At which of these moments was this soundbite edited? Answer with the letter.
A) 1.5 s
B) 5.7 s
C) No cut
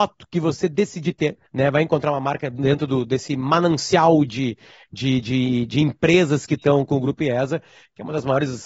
A